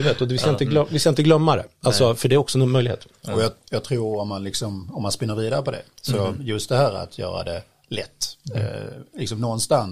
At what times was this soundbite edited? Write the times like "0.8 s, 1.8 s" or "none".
none